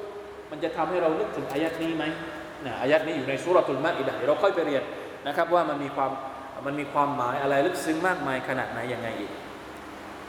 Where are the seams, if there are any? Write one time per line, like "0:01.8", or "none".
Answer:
none